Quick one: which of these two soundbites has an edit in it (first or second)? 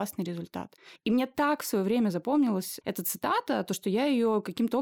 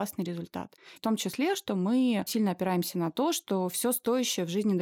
second